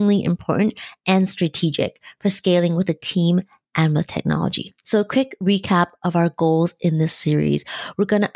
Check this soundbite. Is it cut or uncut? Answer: uncut